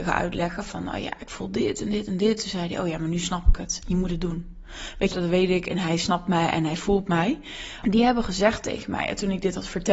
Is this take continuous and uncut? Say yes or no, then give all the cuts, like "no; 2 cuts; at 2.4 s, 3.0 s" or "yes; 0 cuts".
no; 2 cuts; at 5.1 s, 7.8 s